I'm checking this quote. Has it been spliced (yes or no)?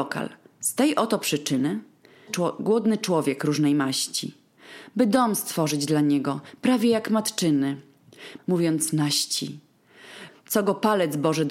yes